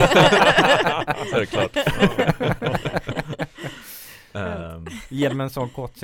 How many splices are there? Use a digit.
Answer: 0